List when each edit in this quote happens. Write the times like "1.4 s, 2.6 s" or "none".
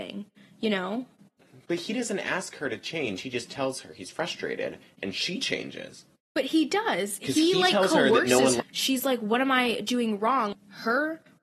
8.6 s, 10.5 s

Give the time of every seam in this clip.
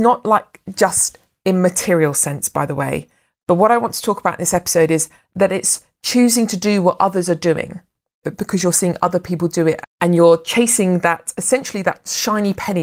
8.2 s, 9.8 s

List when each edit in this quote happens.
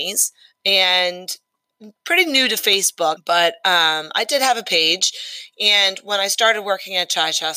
3.2 s

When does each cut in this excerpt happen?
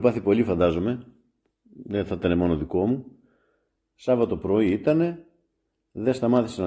3.8 s

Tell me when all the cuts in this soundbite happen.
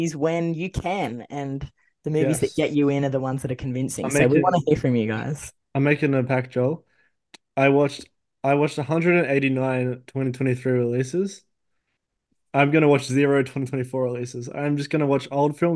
none

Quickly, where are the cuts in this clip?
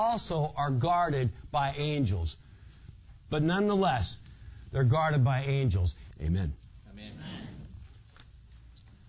3.3 s, 6.1 s

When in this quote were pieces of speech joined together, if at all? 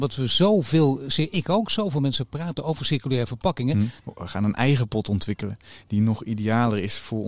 4.0 s

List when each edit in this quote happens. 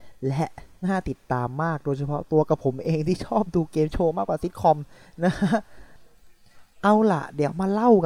none

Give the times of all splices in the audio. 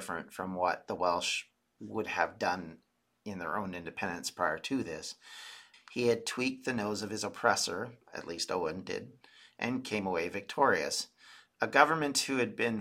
5.7 s

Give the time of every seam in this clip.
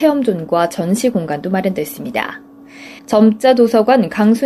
3.0 s

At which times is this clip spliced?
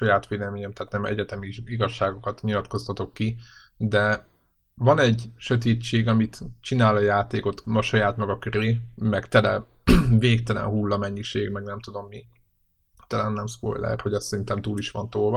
none

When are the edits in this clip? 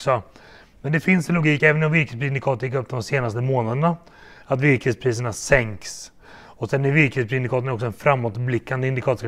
none

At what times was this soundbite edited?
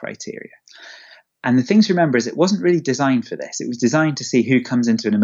none

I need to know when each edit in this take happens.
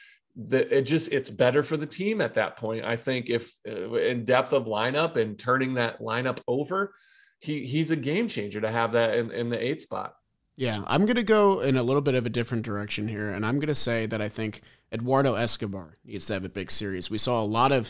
none

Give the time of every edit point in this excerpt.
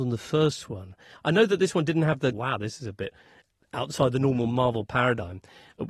2.3 s

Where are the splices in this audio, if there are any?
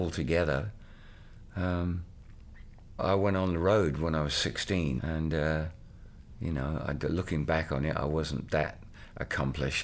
3.0 s, 5.0 s

